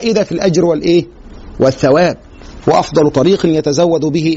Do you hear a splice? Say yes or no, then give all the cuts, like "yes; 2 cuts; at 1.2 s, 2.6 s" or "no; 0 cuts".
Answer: yes; 1 cut; at 2.6 s